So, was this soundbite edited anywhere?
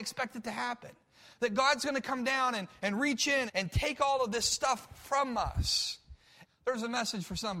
yes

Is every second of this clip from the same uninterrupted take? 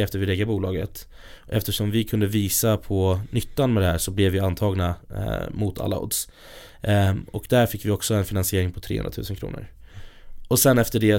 yes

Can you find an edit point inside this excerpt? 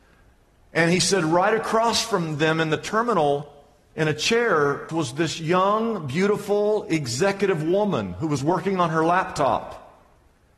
yes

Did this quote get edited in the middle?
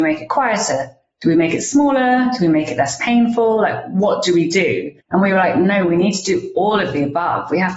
yes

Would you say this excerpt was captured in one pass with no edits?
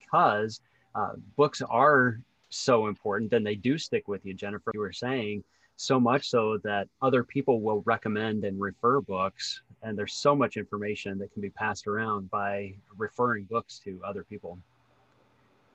no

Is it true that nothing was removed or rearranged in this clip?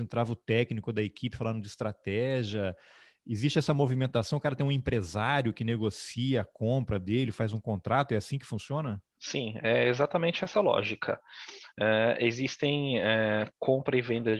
yes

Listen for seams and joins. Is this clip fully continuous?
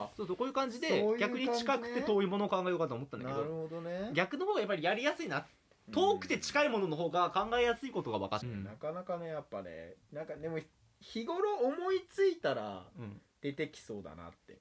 no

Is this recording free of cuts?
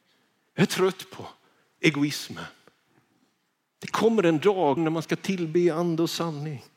no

